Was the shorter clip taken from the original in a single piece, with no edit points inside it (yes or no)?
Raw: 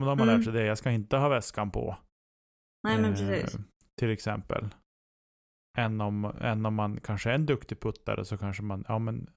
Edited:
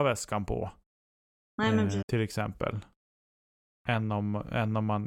no